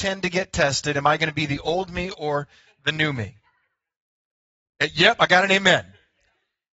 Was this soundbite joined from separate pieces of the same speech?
no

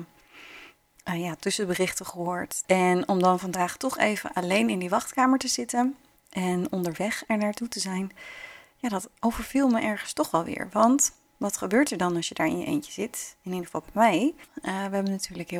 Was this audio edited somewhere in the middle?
yes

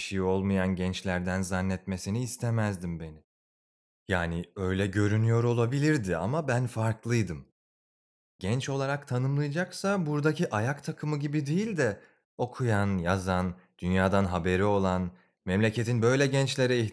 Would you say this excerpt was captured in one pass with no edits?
yes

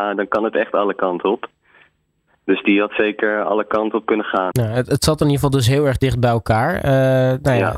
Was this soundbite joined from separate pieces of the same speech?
yes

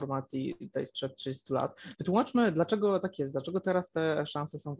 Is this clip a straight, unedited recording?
yes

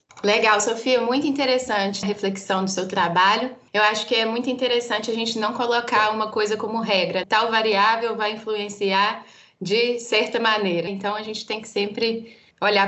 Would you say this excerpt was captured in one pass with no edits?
yes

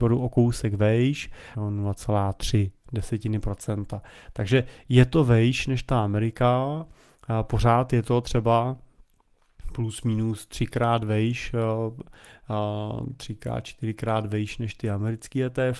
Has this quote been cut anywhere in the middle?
yes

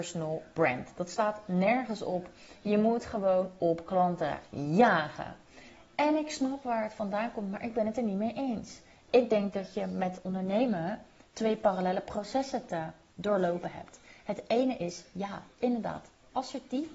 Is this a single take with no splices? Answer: yes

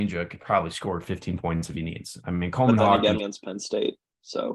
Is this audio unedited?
no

